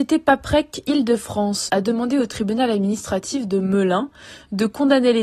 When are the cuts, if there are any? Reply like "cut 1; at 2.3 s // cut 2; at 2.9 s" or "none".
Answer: cut 1; at 1.7 s